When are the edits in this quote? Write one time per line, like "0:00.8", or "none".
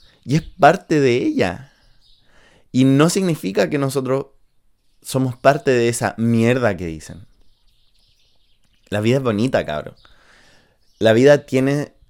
none

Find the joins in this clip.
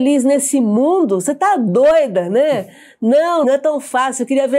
0:03.4

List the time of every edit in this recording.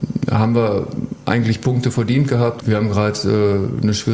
0:02.6

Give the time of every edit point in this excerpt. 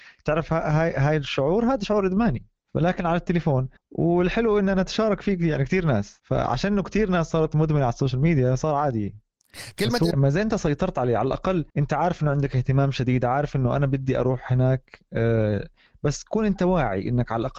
0:10.1

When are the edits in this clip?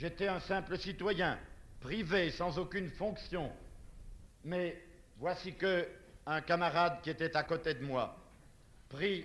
0:04.3

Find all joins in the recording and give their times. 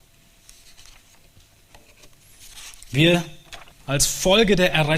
0:03.7

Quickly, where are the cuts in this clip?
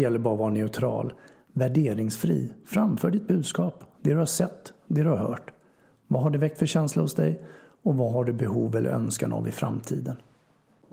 none

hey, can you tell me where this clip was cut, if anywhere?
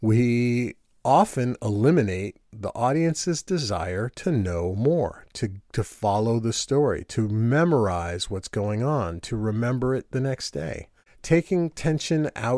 none

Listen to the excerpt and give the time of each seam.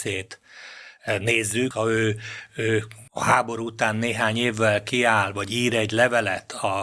0:01.7
0:03.1

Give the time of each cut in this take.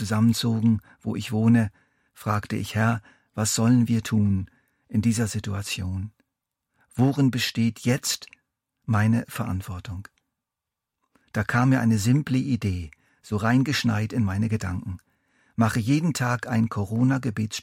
none

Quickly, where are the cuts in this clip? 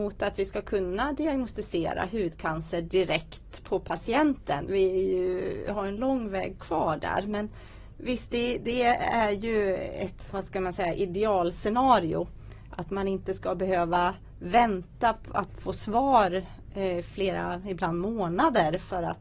none

